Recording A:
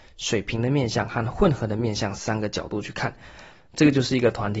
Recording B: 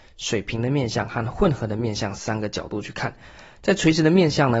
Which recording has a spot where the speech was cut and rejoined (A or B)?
A